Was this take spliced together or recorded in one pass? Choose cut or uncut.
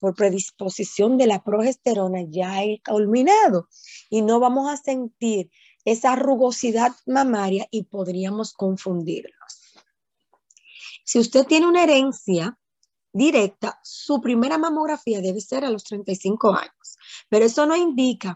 cut